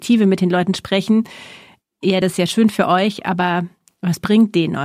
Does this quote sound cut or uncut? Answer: uncut